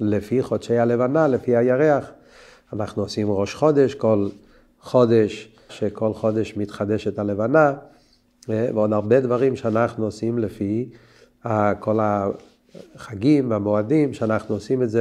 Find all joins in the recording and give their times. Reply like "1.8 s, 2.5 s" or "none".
5.7 s